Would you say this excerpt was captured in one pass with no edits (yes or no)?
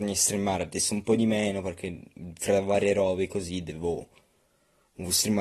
yes